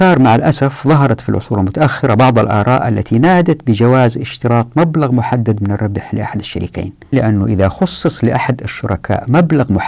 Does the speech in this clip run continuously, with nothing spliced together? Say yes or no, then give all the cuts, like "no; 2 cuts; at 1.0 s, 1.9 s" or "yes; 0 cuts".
no; 1 cut; at 7.1 s